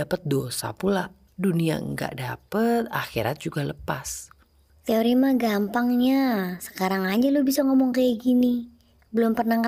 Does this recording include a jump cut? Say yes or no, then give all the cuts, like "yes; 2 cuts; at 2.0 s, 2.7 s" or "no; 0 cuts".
yes; 1 cut; at 1.3 s